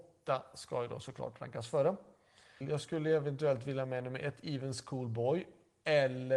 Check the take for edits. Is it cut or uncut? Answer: cut